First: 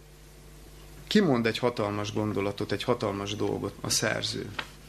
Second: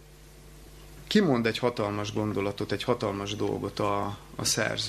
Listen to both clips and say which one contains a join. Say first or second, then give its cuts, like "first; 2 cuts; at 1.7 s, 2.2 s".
first; 1 cut; at 3.7 s